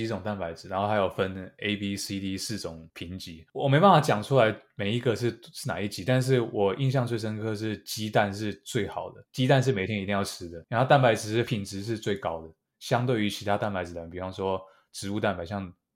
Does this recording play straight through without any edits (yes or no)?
no